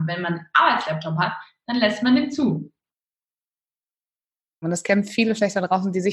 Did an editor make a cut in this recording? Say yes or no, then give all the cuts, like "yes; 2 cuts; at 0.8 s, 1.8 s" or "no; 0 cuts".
yes; 1 cut; at 4.6 s